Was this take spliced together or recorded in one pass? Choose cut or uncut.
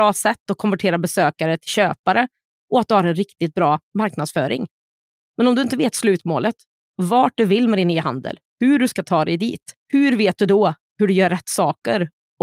cut